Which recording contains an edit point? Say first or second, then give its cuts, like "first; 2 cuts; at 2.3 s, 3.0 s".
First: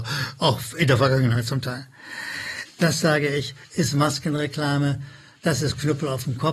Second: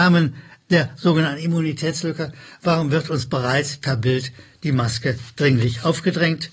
first; 1 cut; at 2.7 s